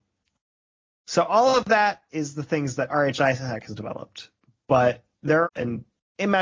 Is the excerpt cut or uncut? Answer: cut